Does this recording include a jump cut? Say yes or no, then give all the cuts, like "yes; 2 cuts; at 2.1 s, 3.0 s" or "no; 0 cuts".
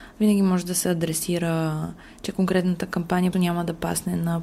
yes; 1 cut; at 3.3 s